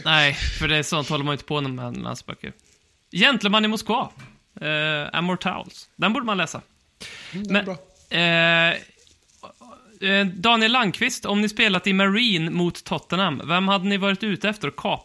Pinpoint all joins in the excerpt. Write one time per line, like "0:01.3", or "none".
none